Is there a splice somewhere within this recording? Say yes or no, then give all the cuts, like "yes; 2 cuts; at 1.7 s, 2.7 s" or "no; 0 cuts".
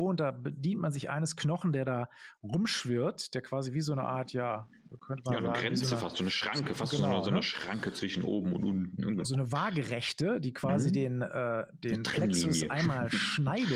no; 0 cuts